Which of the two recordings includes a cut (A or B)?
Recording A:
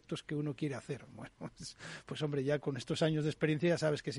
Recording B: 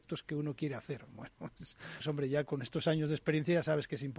B